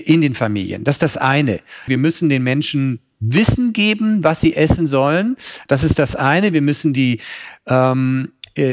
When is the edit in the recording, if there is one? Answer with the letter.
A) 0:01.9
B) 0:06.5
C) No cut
A